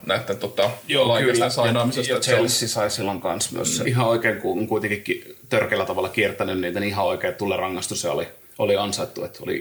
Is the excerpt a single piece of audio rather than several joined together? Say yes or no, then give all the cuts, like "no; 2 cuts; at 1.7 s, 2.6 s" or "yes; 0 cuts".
no; 1 cut; at 3.8 s